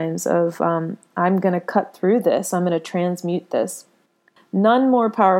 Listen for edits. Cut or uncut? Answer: cut